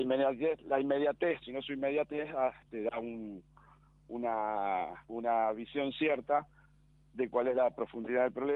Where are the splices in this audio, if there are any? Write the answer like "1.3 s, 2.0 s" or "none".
1.4 s, 2.7 s, 5.0 s